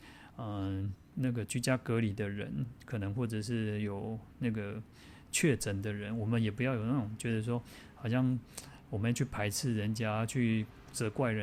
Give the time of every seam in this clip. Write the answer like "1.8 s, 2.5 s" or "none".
1.1 s